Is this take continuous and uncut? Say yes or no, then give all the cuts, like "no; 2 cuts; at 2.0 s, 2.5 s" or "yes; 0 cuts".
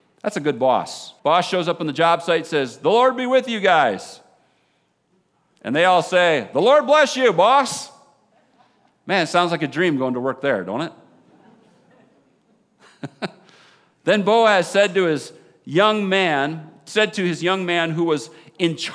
no; 1 cut; at 1.2 s